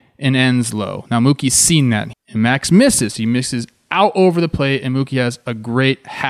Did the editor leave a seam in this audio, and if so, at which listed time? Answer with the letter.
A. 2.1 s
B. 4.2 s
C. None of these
A